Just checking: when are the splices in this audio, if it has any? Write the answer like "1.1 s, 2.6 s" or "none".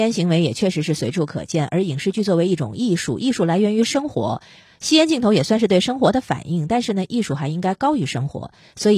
none